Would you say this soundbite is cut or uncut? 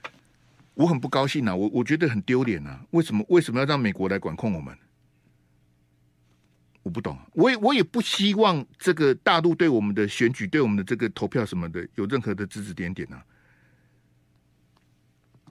uncut